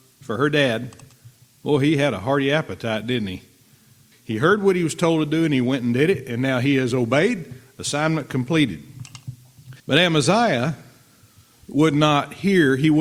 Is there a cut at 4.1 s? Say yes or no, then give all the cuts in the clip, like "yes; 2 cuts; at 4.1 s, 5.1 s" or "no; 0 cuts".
yes; 2 cuts; at 4.1 s, 9.8 s